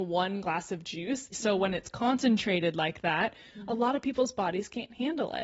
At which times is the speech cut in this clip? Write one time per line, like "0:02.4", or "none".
0:01.3